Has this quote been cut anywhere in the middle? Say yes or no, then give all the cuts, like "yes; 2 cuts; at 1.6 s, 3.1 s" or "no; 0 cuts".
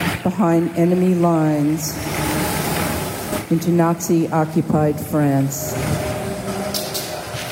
no; 0 cuts